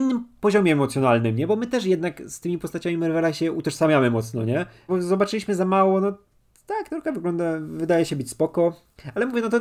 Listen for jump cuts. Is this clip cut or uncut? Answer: cut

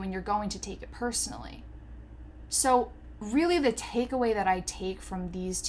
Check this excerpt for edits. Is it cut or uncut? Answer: uncut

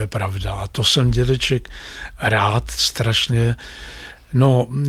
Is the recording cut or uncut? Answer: uncut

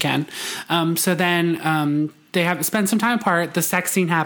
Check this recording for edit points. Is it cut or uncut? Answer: uncut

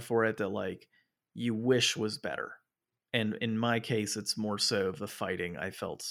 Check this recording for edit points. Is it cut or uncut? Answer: uncut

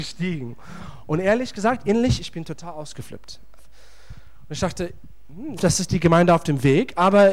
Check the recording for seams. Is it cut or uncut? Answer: cut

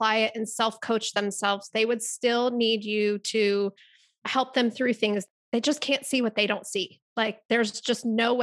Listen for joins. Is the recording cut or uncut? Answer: uncut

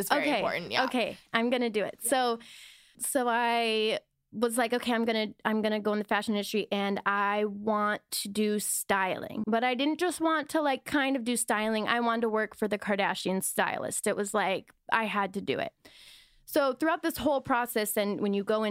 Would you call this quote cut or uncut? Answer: cut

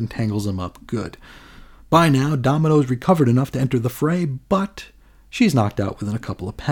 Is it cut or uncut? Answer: uncut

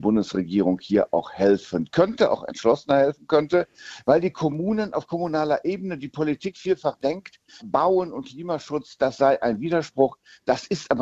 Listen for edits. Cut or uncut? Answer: cut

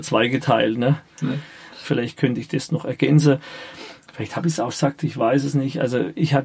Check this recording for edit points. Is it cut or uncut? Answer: cut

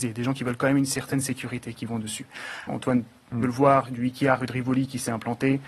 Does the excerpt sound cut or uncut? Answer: cut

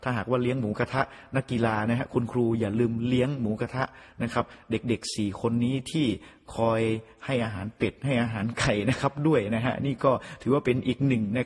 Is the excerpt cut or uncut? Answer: uncut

